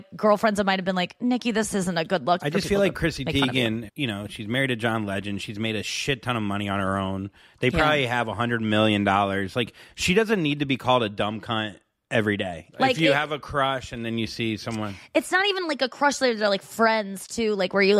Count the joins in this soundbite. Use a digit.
3